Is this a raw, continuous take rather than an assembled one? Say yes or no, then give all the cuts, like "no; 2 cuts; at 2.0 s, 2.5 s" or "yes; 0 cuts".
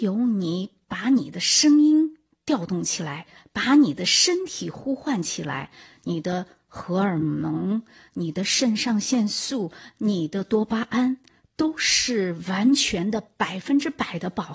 yes; 0 cuts